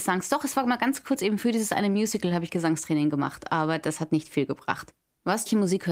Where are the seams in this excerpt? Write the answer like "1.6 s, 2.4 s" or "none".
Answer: none